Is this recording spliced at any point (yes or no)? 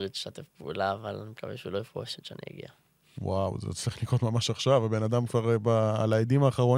no